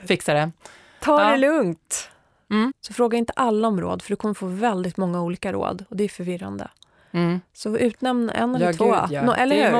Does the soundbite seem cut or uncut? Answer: cut